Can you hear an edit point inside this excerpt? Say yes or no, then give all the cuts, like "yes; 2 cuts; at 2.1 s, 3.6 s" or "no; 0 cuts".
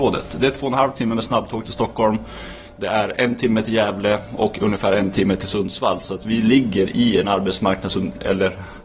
no; 0 cuts